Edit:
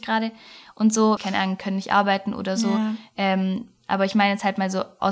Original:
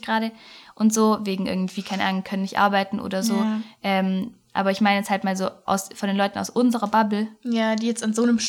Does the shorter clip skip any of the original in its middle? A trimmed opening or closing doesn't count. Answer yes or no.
yes